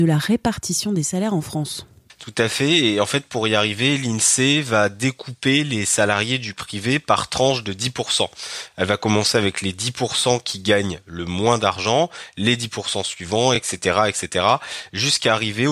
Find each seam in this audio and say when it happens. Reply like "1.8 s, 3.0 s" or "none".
none